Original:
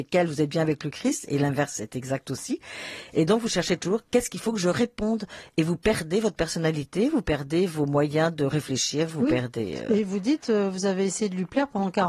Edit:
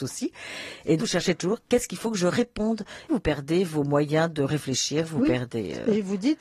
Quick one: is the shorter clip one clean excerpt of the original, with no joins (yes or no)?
no